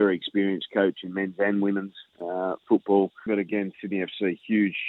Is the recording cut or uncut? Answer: cut